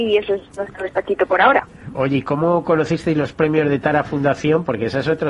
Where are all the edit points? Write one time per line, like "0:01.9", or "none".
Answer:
0:01.9